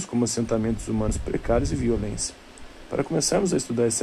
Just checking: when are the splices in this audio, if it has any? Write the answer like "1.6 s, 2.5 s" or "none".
none